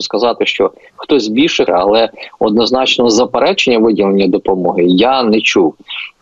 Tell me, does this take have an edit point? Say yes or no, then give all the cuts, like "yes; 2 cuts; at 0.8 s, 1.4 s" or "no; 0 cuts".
yes; 1 cut; at 1.7 s